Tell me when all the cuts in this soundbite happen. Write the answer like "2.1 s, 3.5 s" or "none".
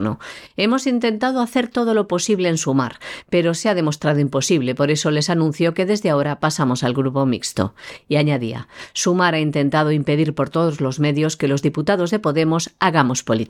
none